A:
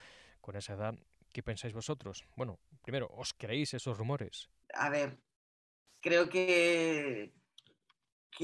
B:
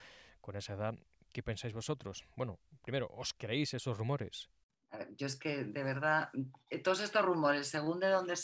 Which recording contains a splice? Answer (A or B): A